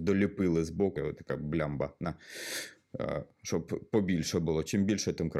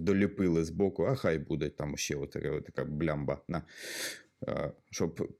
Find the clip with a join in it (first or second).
first